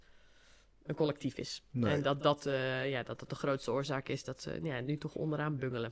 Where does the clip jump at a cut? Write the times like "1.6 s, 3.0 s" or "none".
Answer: none